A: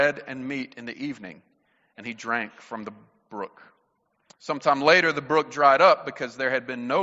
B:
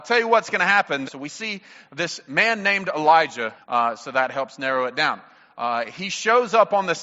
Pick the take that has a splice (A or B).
B